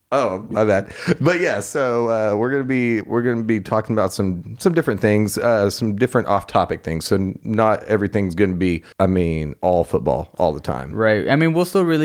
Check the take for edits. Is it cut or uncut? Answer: cut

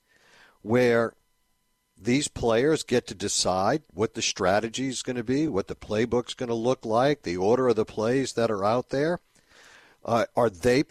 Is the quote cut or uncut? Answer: uncut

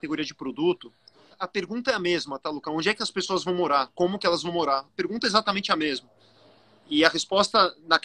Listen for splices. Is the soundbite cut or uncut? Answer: cut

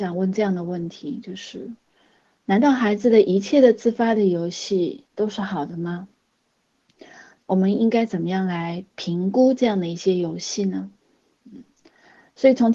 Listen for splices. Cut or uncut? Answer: cut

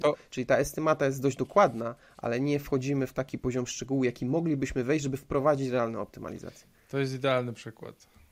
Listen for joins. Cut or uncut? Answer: uncut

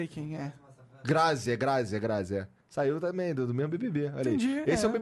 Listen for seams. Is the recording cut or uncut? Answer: uncut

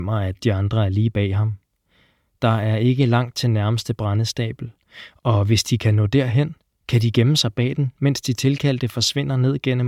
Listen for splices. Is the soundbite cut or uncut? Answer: uncut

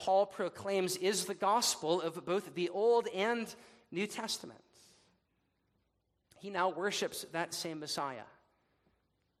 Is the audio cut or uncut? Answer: cut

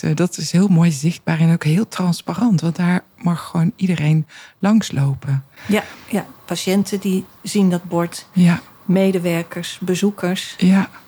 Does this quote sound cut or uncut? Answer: uncut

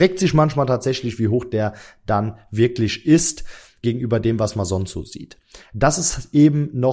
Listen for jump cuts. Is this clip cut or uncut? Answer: uncut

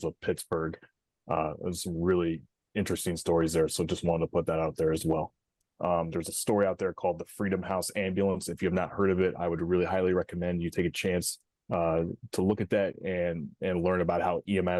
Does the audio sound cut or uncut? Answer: cut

